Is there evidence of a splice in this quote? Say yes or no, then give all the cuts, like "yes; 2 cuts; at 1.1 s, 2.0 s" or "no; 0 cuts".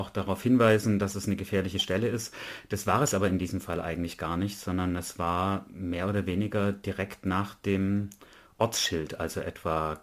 no; 0 cuts